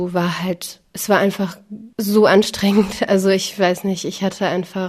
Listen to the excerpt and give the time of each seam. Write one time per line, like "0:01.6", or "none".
0:01.9